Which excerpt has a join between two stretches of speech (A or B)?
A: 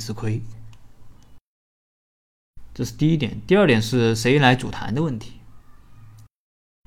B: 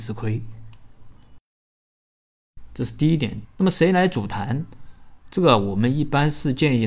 B